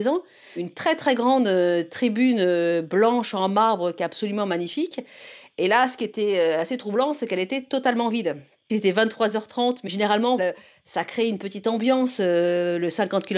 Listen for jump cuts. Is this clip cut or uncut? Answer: cut